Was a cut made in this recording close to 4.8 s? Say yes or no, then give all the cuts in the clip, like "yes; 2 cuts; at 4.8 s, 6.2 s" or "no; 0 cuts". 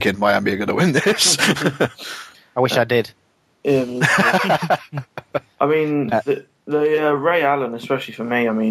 no; 0 cuts